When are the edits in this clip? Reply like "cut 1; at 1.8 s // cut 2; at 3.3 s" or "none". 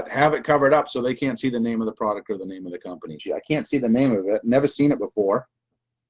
cut 1; at 3.2 s